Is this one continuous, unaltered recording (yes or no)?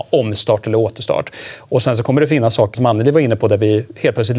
no